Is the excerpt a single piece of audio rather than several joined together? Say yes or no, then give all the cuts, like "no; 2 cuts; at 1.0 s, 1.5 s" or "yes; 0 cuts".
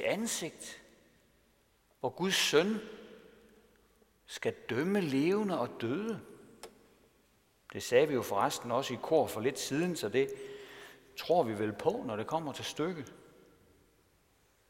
yes; 0 cuts